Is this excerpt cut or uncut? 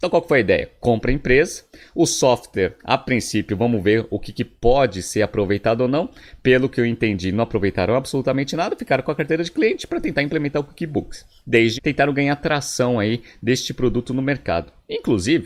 cut